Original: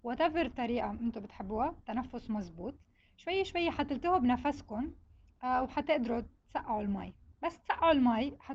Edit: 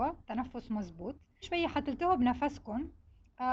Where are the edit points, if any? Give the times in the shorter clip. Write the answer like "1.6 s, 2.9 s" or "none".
1.4 s